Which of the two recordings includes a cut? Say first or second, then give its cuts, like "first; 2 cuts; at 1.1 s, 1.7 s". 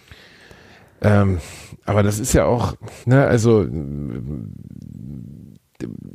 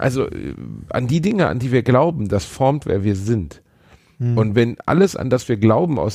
first; 1 cut; at 3.0 s